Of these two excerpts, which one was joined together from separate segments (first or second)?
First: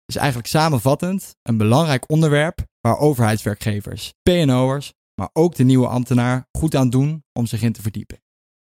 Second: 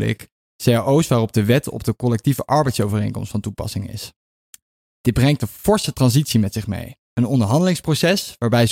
second